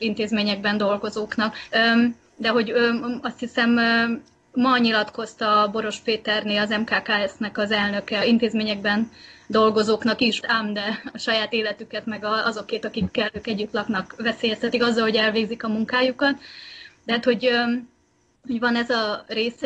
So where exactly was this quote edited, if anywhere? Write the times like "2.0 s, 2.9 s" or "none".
1.7 s, 8.2 s, 10.4 s